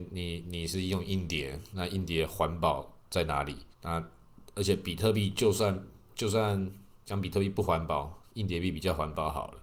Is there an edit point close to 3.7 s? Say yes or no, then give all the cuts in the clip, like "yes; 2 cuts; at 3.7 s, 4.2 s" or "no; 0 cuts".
yes; 1 cut; at 3.7 s